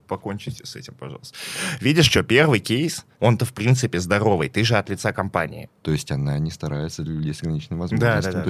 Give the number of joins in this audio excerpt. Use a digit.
2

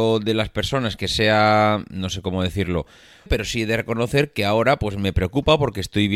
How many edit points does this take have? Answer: 1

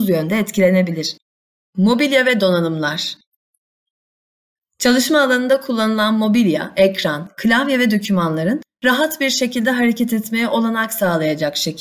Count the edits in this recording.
1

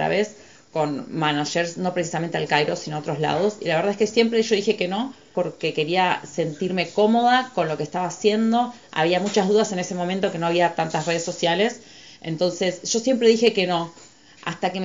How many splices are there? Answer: 1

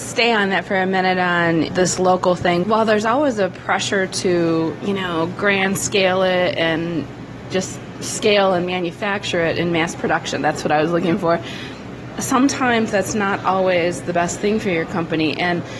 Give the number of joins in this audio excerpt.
1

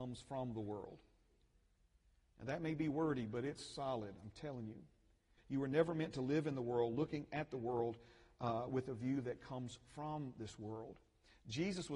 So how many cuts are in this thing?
1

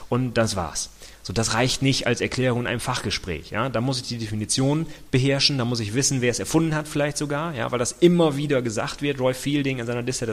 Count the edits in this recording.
0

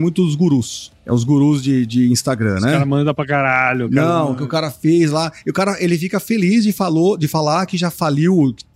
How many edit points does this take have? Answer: 0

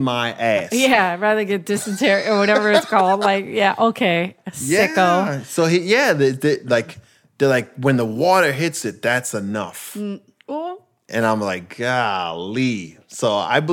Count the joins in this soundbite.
0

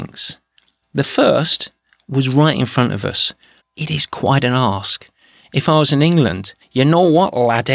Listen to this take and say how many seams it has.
2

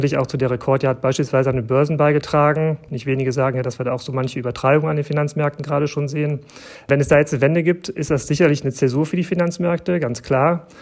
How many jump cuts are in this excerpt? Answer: 0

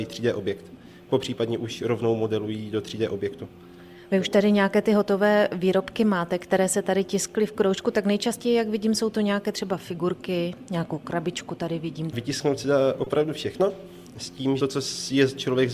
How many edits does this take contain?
2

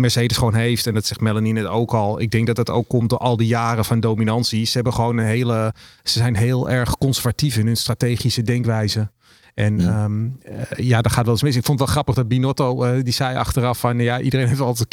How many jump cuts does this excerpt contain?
0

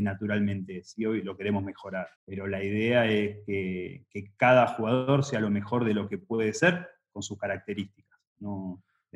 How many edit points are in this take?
1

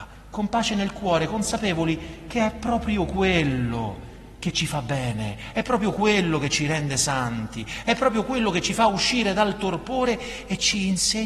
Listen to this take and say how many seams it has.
0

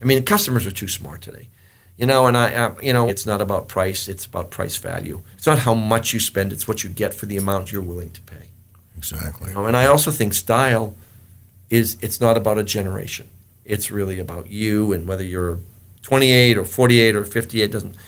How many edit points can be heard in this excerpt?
3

